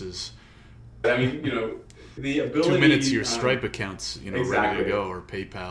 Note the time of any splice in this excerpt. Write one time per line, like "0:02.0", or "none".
0:01.0
0:02.2